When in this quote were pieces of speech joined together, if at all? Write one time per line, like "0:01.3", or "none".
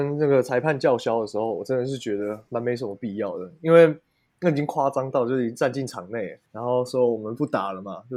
0:06.5